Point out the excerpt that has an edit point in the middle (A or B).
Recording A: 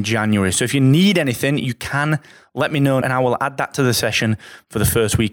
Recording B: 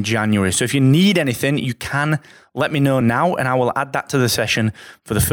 A